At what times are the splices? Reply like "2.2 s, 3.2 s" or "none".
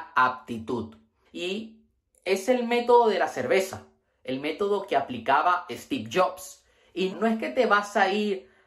1.2 s, 7.1 s